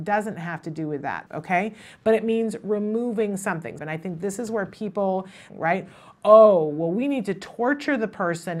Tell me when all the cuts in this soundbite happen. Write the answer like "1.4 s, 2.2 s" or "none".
1.3 s, 3.8 s, 5.5 s